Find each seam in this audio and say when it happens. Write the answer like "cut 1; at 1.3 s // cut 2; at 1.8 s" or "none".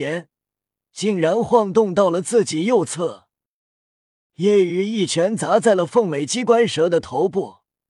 cut 1; at 4.3 s